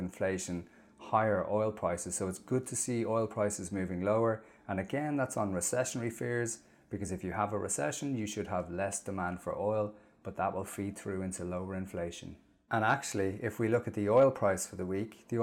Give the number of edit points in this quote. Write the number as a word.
one